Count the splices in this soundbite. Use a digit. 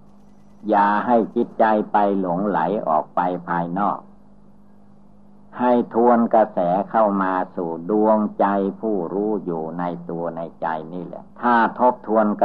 1